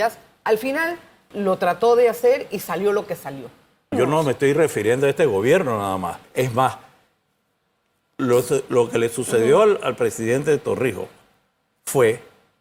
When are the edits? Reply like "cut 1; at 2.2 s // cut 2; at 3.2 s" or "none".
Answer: cut 1; at 1.3 s // cut 2; at 3.9 s // cut 3; at 6.2 s